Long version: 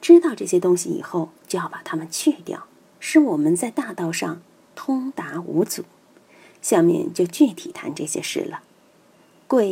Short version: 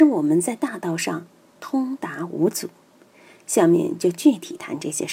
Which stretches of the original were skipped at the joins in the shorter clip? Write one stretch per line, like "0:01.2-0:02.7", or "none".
none